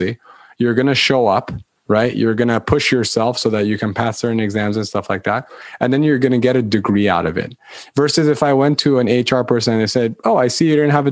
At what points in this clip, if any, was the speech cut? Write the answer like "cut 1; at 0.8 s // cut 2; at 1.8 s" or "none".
none